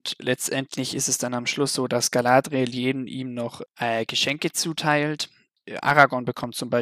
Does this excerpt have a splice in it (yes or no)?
no